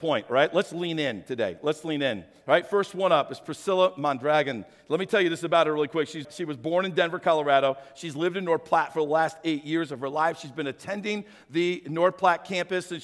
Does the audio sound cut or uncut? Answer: cut